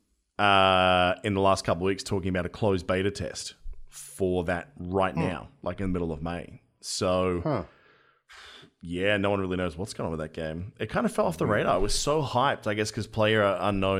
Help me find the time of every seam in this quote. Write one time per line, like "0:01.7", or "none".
none